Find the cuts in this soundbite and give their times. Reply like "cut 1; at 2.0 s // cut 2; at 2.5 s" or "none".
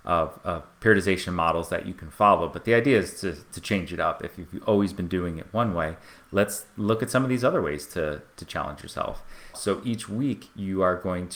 cut 1; at 9.5 s